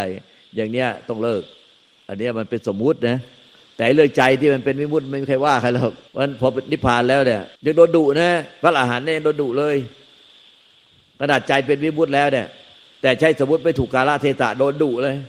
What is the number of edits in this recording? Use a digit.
2